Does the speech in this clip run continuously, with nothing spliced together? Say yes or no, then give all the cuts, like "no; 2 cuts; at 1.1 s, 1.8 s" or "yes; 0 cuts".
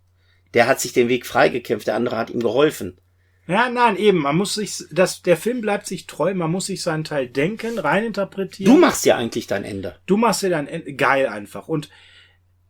yes; 0 cuts